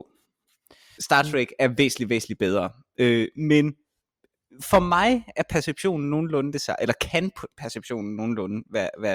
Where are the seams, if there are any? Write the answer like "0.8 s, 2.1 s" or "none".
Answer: 1.0 s